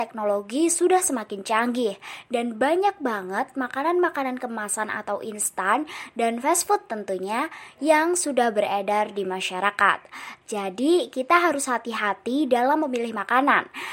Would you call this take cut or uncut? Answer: cut